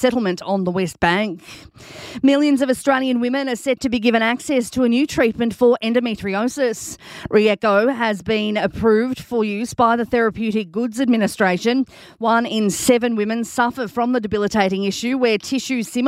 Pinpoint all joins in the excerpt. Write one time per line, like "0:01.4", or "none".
none